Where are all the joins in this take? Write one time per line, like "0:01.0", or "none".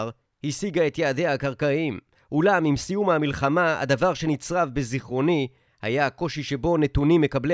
0:02.1